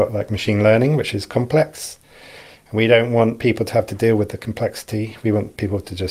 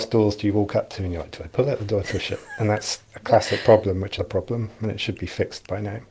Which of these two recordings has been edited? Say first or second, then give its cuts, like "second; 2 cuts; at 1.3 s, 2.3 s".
second; 2 cuts; at 3.1 s, 4.2 s